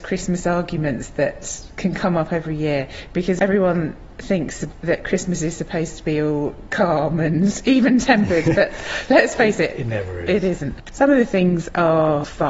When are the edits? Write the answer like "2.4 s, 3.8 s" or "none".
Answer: none

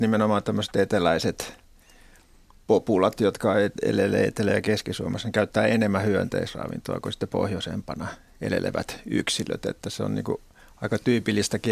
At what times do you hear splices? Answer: none

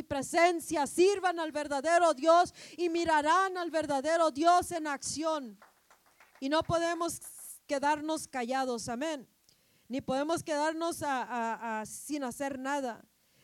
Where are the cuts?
6.3 s

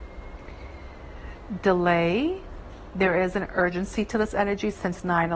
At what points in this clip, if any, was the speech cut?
none

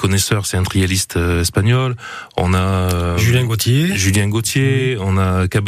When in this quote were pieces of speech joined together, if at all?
none

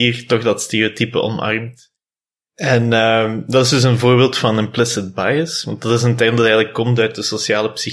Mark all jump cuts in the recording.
none

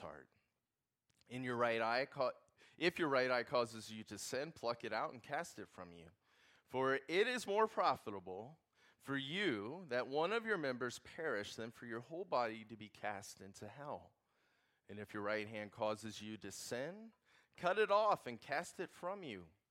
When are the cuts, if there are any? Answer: none

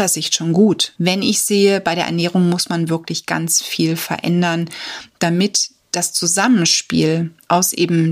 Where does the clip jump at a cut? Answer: 0.9 s

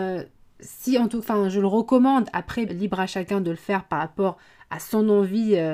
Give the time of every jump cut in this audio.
2.7 s

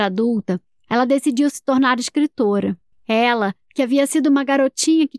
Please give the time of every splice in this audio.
2.9 s

